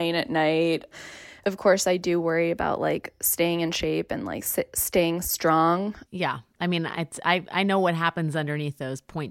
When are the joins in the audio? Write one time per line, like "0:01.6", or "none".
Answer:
0:06.0

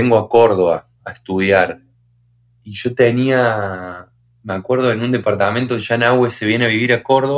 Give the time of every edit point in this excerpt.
none

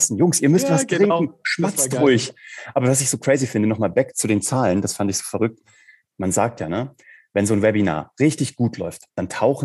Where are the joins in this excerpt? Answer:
none

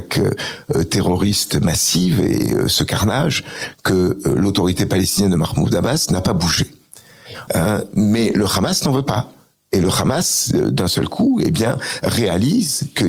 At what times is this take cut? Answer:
0:07.5

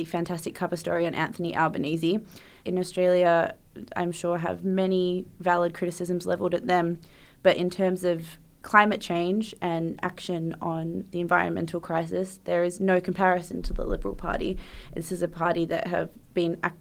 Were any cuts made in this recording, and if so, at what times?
0:02.7

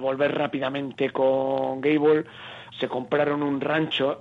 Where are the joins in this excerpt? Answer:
0:02.7

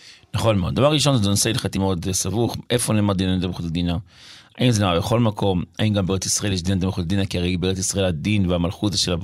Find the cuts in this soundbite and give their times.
0:01.8

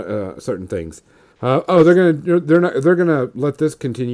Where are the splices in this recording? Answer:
0:01.3

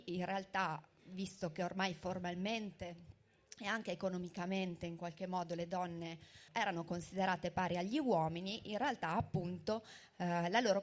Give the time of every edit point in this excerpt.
0:06.5

